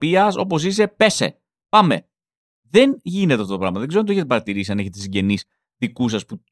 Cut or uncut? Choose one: uncut